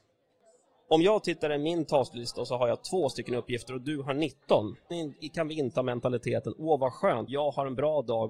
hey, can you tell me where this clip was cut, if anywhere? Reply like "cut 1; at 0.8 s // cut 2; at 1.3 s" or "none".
cut 1; at 4.9 s // cut 2; at 7.3 s